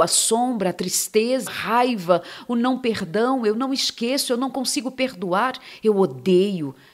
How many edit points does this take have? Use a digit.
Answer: 1